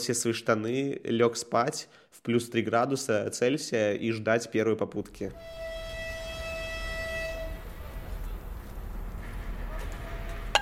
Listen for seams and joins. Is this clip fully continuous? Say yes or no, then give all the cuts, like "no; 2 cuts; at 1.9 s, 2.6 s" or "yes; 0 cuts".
yes; 0 cuts